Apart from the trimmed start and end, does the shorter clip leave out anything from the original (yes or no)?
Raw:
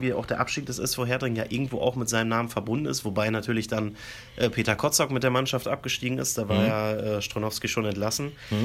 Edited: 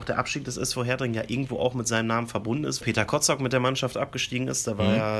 yes